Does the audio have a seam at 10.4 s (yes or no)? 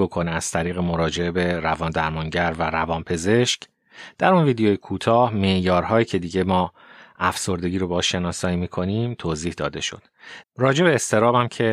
yes